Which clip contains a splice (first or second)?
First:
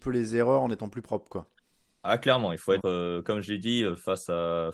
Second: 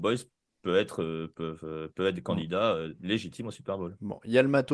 first